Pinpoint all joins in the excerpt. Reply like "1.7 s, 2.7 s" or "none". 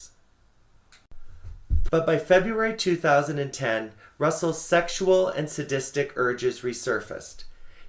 1.9 s